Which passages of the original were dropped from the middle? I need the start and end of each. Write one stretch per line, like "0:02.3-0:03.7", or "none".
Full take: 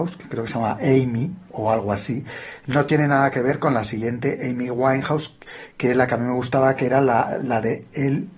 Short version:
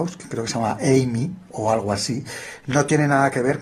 none